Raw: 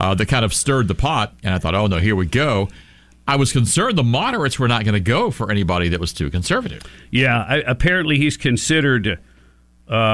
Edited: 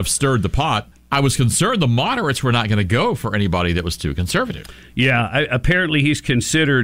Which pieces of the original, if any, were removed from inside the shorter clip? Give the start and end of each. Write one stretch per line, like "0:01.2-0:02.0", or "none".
0:01.4-0:03.1